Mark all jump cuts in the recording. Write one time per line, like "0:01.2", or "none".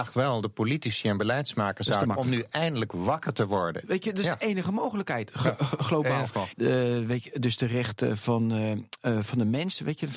0:03.8
0:06.5